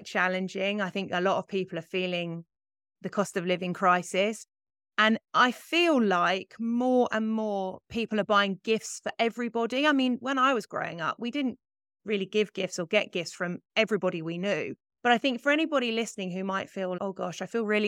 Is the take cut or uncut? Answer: cut